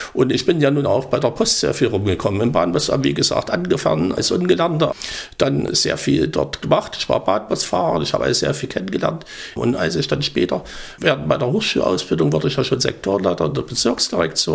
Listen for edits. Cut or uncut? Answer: uncut